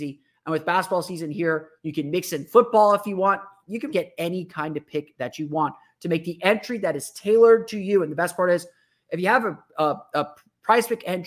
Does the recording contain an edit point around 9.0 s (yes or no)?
no